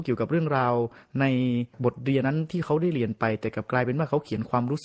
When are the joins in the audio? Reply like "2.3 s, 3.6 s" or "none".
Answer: 2.2 s